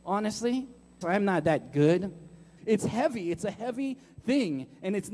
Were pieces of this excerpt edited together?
yes; 2 cuts; at 1.0 s, 2.6 s

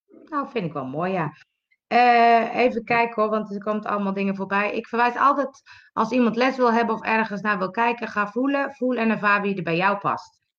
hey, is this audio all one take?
yes; 0 cuts

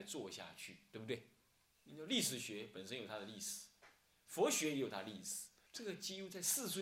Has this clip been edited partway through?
yes; 3 cuts; at 1.6 s, 4.3 s, 5.7 s

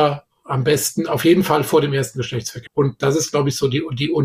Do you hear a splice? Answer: yes; 1 cut; at 2.7 s

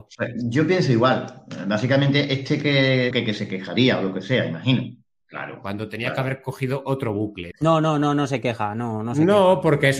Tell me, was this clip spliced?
yes; 3 cuts; at 3.1 s, 5.2 s, 7.5 s

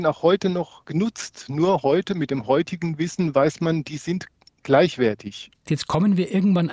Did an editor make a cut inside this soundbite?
yes; 1 cut; at 5.6 s

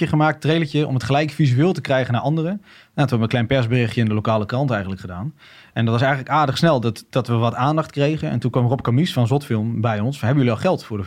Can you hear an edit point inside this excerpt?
no; 0 cuts

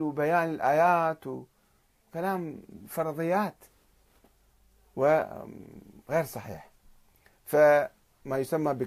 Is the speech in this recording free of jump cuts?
no; 1 cut; at 2.0 s

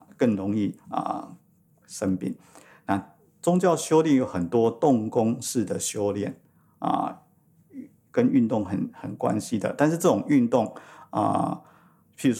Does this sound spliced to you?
no; 0 cuts

